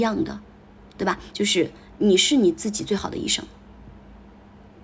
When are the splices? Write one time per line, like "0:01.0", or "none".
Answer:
0:01.3